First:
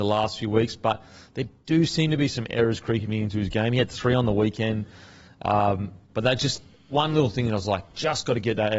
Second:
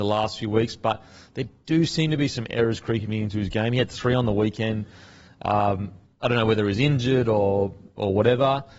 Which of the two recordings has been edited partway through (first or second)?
first